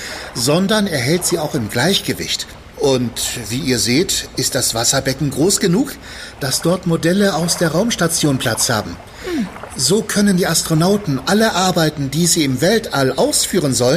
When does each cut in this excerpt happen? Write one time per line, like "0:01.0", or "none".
0:02.7